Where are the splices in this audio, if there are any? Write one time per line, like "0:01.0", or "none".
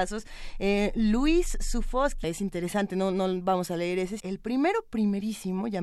0:02.2
0:04.2